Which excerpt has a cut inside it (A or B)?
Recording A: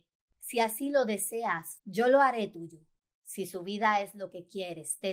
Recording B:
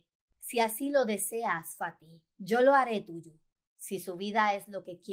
A